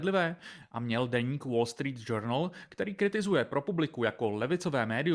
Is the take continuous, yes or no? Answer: yes